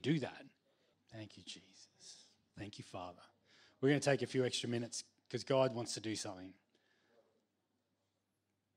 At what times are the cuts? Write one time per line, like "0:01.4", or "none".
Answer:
0:00.9
0:02.5